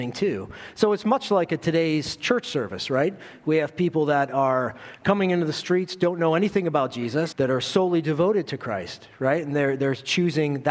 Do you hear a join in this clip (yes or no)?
yes